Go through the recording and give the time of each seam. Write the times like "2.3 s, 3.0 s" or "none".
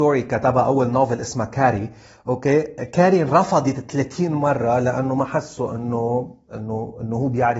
none